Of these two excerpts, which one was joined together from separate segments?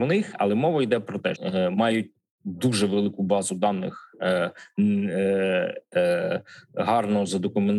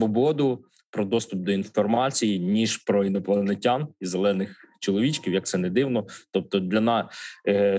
first; 1 cut; at 1.3 s

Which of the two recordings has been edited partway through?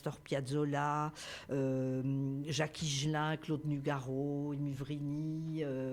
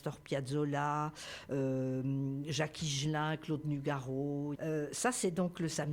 second; 1 cut; at 4.5 s

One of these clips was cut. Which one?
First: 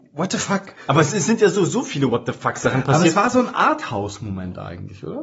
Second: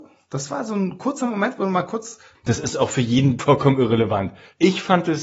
second; 2 cuts; at 2.3 s, 3.4 s

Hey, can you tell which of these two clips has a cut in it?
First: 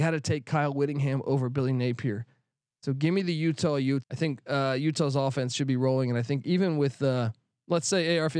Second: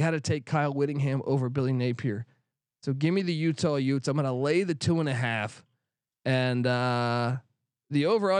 first; 1 cut; at 4.0 s

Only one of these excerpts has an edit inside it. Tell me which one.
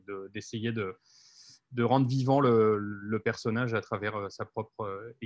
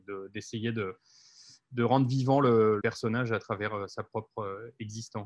second; 1 cut; at 2.8 s

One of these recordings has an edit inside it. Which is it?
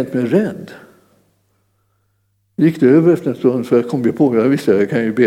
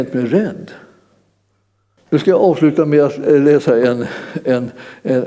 second; 1 cut; at 2.0 s

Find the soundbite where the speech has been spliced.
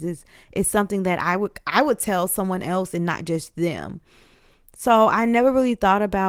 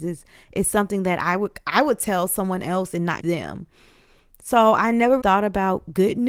second; 2 cuts; at 3.2 s, 5.2 s

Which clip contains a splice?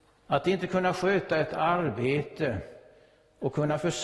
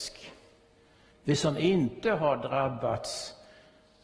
second; 1 cut; at 1.1 s

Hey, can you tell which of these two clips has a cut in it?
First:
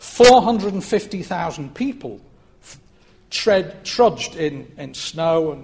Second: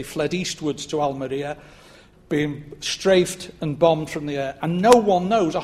second; 1 cut; at 2.1 s

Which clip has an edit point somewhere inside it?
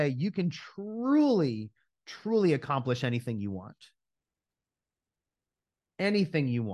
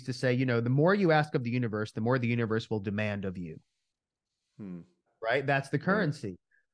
second; 1 cut; at 5.1 s

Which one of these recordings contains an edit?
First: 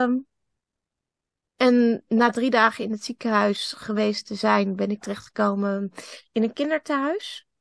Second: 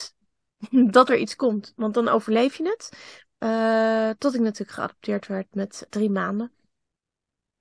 second; 2 cuts; at 3.2 s, 5.9 s

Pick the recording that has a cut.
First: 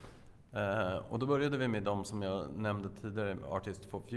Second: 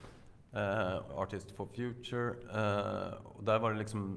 second; 1 cut; at 1.1 s

